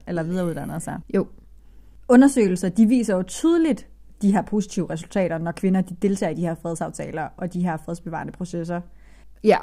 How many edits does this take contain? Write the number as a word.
one